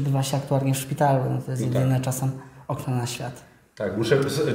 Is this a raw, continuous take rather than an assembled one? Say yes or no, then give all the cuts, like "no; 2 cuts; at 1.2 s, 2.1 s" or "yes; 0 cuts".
yes; 0 cuts